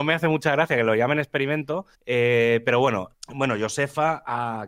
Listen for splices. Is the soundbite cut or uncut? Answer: cut